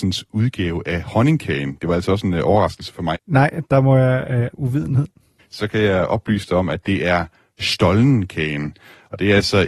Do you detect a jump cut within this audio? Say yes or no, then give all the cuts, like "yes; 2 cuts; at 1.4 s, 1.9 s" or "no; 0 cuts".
yes; 2 cuts; at 3.1 s, 4.5 s